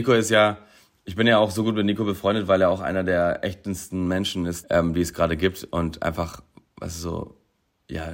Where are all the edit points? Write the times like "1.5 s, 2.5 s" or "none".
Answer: 4.6 s